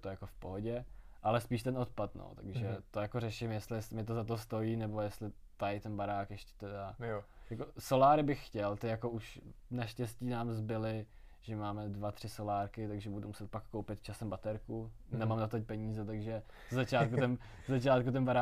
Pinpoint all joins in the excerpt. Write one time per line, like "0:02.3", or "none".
none